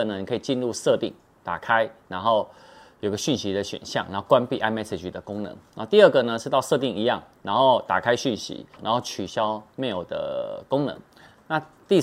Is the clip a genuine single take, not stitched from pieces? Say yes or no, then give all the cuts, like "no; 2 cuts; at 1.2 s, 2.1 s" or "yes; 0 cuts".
no; 1 cut; at 8.8 s